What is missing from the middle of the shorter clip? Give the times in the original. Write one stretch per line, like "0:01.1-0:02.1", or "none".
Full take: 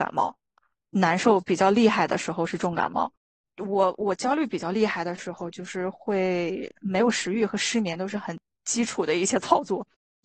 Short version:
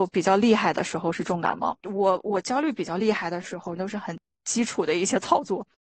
0:03.1-0:03.5
0:05.5-0:08.0